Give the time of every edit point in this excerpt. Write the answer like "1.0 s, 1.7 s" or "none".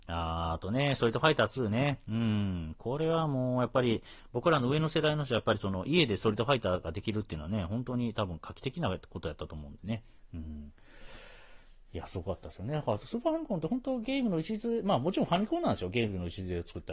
none